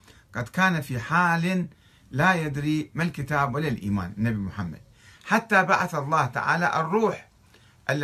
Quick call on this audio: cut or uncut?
uncut